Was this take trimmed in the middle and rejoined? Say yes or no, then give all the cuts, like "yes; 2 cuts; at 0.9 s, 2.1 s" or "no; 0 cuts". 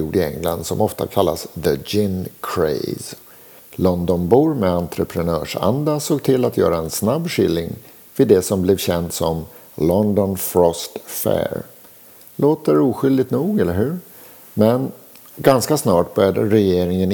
yes; 1 cut; at 3.6 s